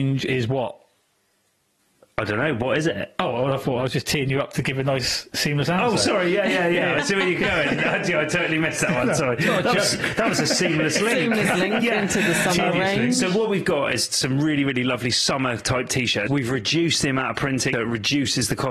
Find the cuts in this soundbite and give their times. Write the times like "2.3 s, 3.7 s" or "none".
16.3 s, 17.7 s